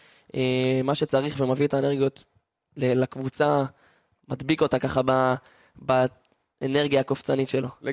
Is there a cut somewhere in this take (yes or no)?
no